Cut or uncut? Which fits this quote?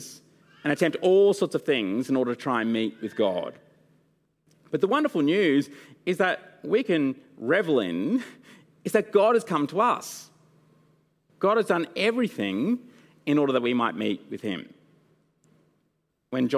uncut